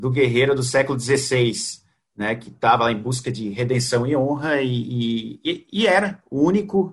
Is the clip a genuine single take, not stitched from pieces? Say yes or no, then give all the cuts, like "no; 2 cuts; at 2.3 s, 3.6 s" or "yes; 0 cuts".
yes; 0 cuts